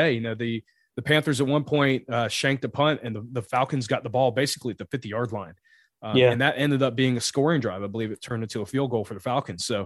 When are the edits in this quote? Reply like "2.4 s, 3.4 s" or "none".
none